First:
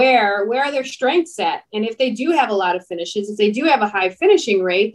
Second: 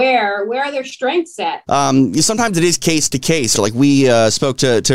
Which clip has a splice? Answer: second; 2 cuts; at 1.7 s, 3.5 s

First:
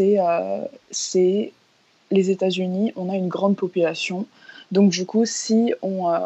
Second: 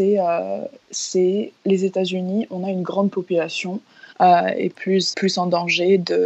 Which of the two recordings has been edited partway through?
second; 3 cuts; at 1.6 s, 4.1 s, 5.1 s

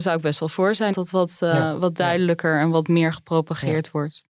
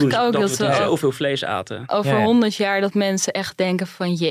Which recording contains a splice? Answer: first; 1 cut; at 0.9 s

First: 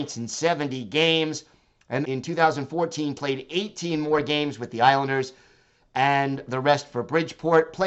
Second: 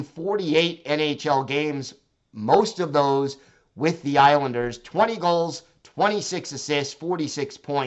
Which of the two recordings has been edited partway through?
first; 2 cuts; at 2.0 s, 3.2 s

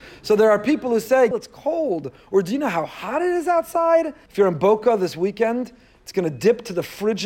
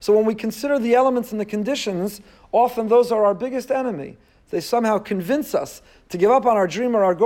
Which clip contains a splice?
first; 2 cuts; at 1.3 s, 4.3 s

